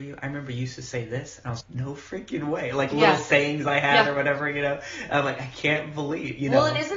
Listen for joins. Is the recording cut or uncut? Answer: cut